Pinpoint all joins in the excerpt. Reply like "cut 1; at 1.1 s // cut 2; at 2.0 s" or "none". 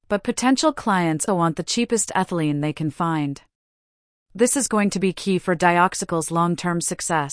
cut 1; at 1.3 s

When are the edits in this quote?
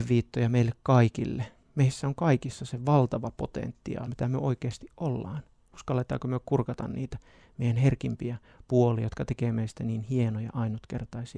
cut 1; at 4.1 s

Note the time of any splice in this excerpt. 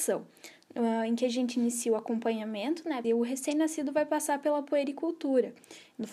cut 1; at 3.0 s

